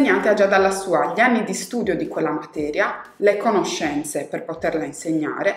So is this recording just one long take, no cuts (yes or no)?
yes